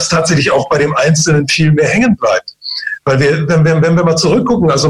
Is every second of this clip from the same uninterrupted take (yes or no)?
yes